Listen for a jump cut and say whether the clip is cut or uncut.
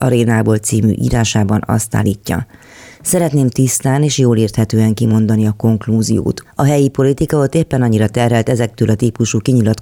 cut